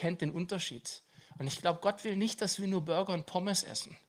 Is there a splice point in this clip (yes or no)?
no